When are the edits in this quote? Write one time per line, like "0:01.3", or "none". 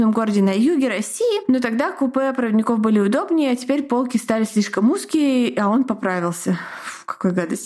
none